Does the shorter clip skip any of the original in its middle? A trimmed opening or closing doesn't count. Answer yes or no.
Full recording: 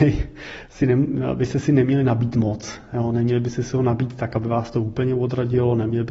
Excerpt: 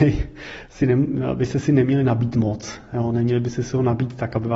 no